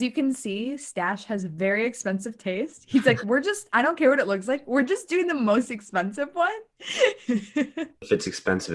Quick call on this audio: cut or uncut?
uncut